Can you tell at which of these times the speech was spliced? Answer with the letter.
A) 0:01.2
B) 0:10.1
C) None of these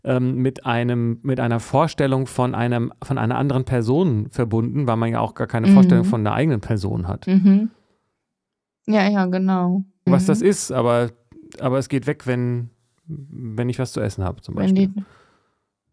B